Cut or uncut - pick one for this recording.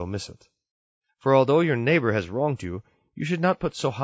uncut